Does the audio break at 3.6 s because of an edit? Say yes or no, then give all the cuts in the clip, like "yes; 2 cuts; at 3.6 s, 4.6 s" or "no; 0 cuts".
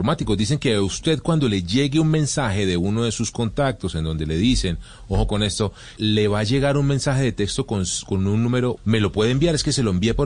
no; 2 cuts; at 6.0 s, 8.8 s